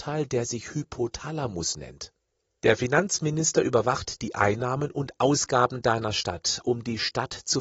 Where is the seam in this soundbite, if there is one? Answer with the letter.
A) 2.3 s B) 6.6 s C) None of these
B